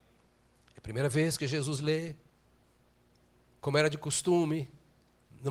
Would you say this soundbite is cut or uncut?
uncut